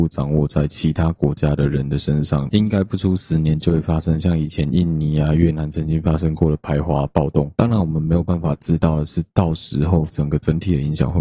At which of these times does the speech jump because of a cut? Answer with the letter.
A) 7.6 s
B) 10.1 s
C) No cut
B